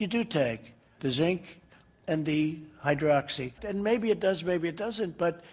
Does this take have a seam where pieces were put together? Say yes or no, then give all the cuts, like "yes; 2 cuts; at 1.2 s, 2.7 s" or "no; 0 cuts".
yes; 2 cuts; at 1.0 s, 3.6 s